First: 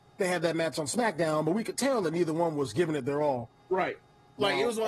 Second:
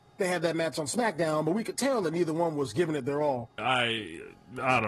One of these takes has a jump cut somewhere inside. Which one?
second; 1 cut; at 3.6 s

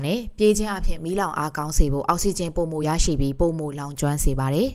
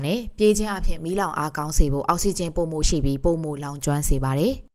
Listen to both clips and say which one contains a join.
second; 1 cut; at 2.8 s

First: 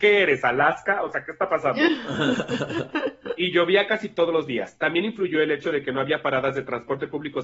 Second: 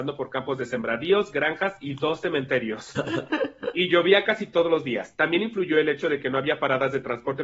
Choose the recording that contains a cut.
second; 1 cut; at 3.0 s

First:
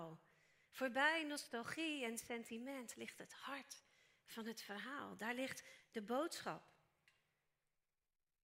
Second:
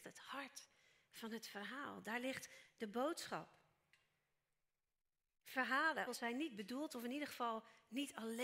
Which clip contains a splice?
second; 1 cut; at 6.1 s

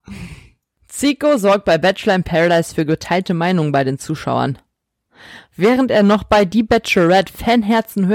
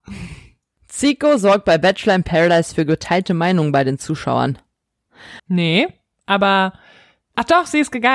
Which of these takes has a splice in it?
second; 1 cut; at 5.4 s

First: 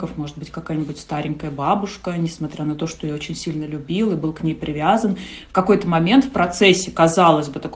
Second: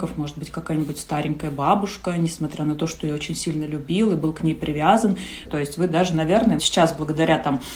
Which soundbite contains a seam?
second; 2 cuts; at 5.4 s, 6.6 s

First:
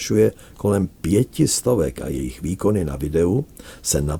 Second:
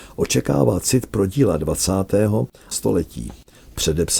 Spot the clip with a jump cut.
second; 1 cut; at 2.7 s

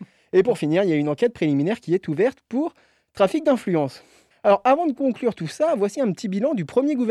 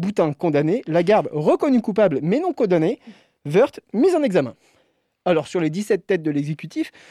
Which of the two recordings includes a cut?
first; 1 cut; at 4.3 s

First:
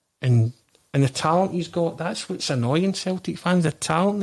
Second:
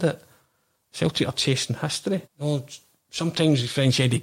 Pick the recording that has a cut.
second; 1 cut; at 2.2 s

